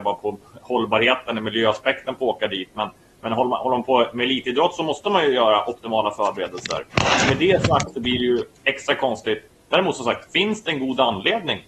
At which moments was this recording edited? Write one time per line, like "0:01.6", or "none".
none